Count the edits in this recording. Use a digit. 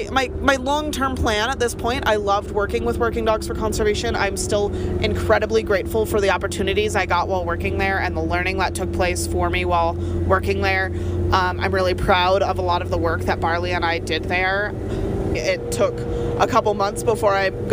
1